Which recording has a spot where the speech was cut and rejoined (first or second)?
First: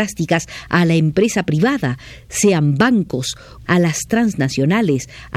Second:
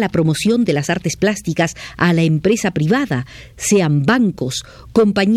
first